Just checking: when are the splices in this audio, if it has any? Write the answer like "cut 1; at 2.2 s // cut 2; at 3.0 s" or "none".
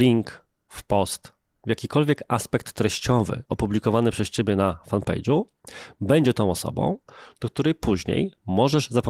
cut 1; at 1.6 s